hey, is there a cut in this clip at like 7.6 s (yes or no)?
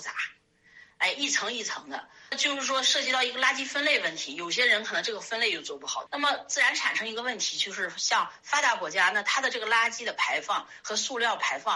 no